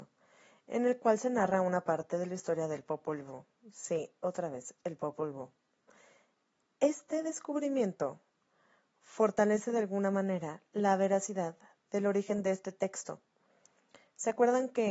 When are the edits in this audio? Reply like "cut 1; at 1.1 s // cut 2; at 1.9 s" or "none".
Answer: none